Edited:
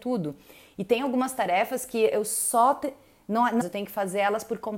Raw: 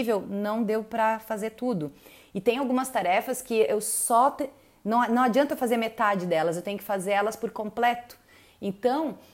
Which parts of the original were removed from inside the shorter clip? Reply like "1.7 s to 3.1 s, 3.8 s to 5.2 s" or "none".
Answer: 5.2 s to 6.5 s